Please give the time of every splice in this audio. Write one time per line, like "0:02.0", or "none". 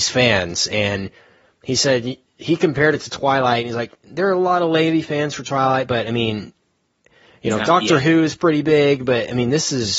none